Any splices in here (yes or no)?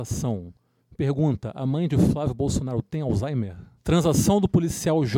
yes